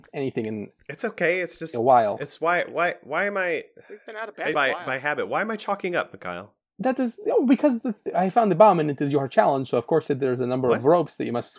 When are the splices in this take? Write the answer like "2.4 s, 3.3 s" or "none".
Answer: 4.5 s